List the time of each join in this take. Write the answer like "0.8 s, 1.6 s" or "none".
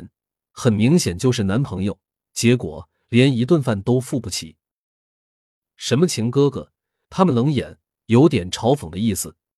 none